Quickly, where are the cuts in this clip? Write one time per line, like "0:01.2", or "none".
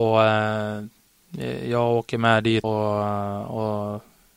0:02.6